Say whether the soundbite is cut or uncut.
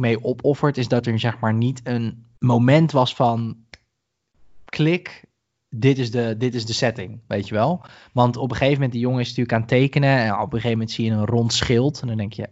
cut